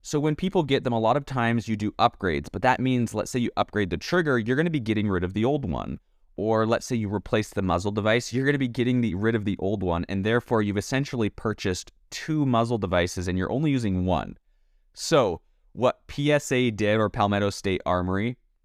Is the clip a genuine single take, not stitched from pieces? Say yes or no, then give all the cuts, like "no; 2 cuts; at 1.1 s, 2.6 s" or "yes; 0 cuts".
yes; 0 cuts